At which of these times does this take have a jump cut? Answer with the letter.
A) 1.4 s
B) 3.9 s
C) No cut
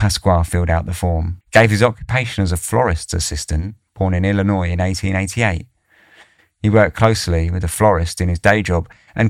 A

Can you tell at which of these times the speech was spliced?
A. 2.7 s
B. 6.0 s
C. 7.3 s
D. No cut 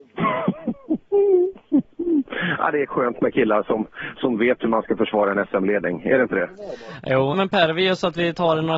C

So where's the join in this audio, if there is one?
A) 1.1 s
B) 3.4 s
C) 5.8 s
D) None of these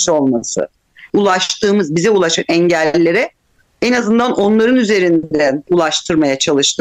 A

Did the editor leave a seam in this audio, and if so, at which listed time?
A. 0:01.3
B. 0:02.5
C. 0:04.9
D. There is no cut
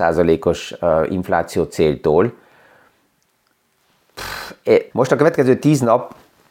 C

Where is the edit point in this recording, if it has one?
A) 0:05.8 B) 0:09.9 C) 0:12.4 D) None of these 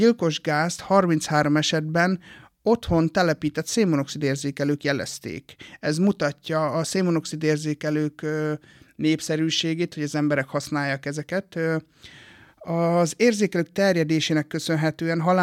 B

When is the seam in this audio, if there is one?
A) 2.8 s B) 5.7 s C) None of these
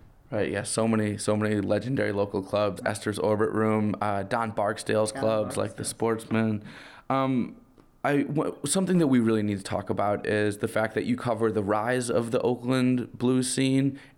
A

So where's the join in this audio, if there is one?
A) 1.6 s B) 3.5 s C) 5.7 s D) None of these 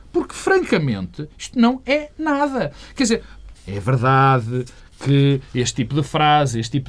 B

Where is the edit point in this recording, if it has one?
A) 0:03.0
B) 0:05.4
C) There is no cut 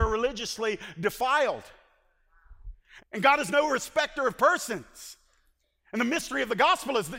A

